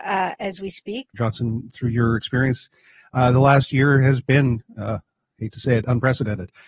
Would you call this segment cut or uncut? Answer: cut